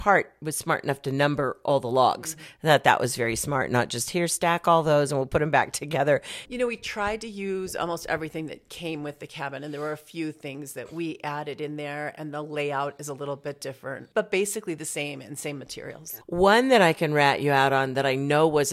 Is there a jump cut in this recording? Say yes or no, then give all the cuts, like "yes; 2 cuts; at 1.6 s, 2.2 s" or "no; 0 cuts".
yes; 2 cuts; at 6.4 s, 16.2 s